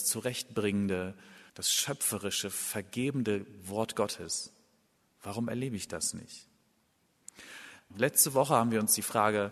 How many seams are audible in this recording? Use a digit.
3